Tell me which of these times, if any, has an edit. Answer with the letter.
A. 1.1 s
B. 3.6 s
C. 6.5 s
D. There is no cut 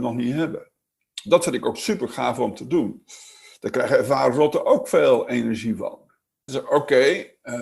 C